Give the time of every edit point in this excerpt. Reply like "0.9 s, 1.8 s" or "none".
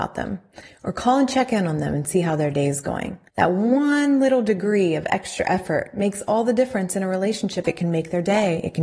3.3 s, 7.6 s